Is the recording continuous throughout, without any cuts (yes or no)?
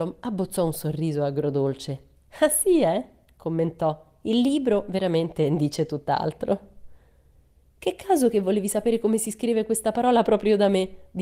yes